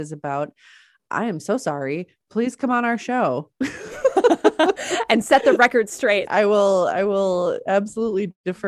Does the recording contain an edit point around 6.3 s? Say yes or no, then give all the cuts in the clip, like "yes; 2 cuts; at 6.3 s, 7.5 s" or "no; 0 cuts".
yes; 1 cut; at 6.3 s